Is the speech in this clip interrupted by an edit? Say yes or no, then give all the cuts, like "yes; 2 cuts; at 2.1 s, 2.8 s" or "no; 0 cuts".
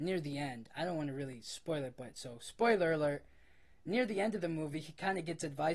no; 0 cuts